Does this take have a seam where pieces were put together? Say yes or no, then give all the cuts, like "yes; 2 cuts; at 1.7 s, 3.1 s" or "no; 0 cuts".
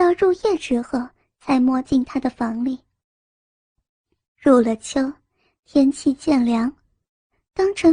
no; 0 cuts